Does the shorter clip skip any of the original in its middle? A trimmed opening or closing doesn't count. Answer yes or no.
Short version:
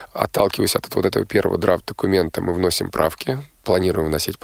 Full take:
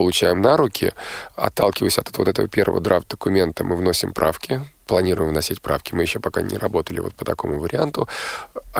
no